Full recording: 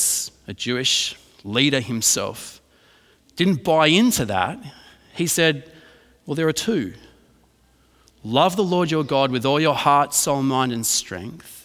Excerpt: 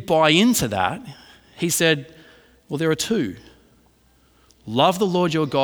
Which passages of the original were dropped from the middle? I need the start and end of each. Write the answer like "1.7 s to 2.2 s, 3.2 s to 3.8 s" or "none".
none